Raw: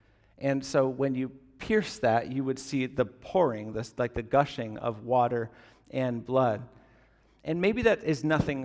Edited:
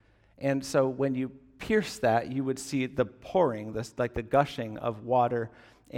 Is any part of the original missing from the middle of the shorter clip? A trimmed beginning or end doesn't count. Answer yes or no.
no